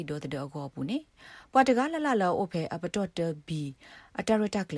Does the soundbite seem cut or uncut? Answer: uncut